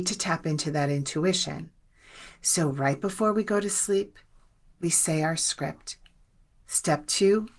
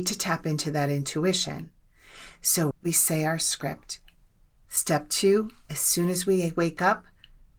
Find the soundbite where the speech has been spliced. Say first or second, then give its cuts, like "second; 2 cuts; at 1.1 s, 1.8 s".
second; 1 cut; at 2.7 s